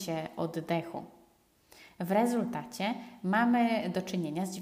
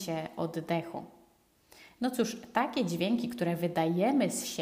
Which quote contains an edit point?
second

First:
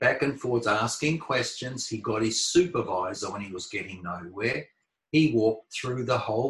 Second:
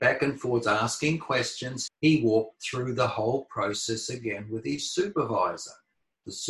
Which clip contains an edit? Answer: second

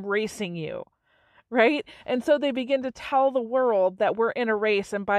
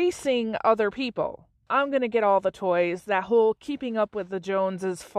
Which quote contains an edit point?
second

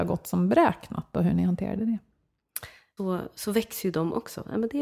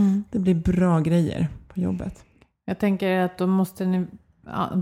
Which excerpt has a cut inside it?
first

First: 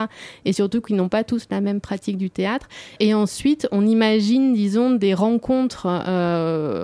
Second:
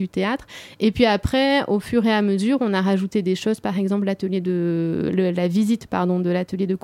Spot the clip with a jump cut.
first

